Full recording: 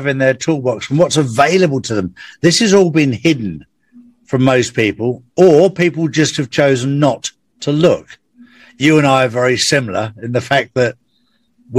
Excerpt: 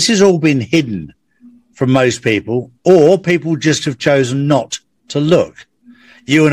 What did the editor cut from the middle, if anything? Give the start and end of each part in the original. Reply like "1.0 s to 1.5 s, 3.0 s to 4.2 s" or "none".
none